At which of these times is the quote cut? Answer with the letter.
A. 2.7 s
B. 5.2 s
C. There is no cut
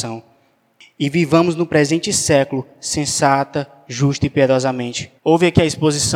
B